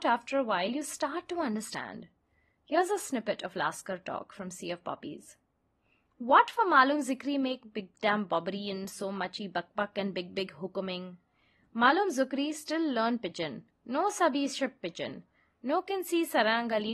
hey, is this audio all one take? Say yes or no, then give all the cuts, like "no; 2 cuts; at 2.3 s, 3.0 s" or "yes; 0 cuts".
yes; 0 cuts